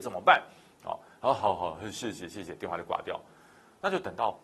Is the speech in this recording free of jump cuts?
yes; 0 cuts

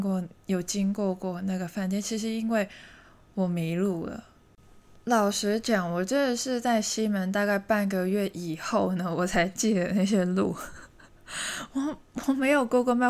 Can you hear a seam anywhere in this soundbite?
no; 0 cuts

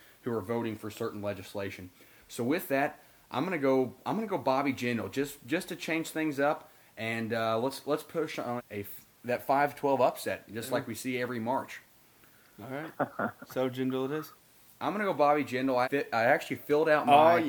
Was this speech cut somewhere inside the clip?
yes; 3 cuts; at 8.6 s, 14.8 s, 15.8 s

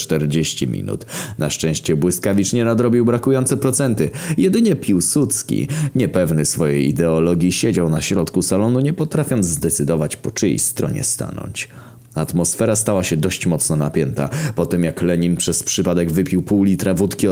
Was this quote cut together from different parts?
no; 0 cuts

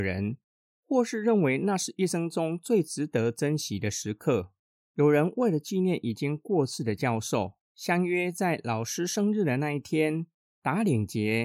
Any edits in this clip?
yes; 2 cuts; at 4.7 s, 7.6 s

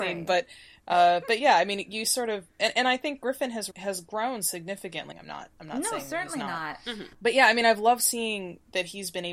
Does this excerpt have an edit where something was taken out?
yes; 2 cuts; at 3.7 s, 5.1 s

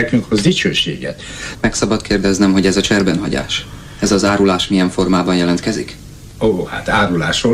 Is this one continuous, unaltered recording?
no; 1 cut; at 1.5 s

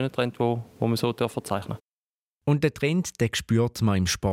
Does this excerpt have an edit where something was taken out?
no; 0 cuts

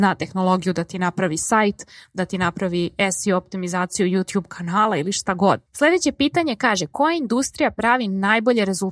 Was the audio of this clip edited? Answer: yes; 1 cut; at 5.7 s

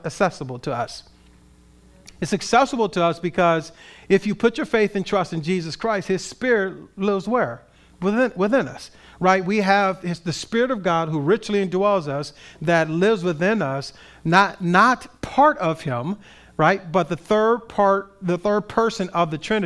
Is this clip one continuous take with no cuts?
yes; 0 cuts

